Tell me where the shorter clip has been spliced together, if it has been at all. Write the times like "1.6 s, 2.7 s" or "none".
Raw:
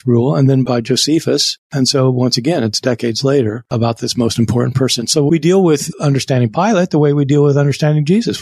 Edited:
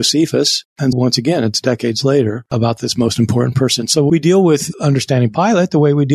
0.9 s